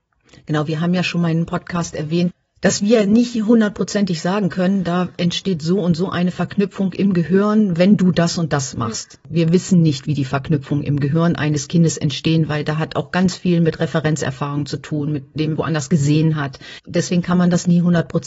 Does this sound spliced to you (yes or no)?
yes